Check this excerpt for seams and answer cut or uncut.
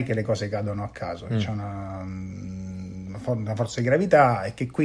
uncut